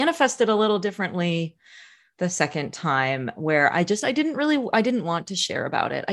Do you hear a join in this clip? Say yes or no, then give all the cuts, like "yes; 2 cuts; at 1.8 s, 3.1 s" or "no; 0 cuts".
no; 0 cuts